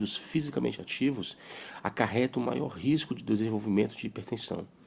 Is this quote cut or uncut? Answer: uncut